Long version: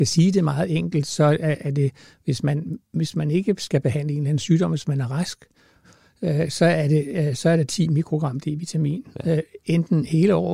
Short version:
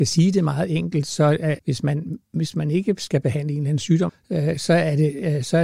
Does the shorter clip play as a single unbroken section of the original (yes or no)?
no